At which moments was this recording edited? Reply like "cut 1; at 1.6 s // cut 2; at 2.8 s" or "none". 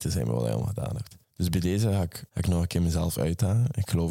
cut 1; at 1.2 s // cut 2; at 2.3 s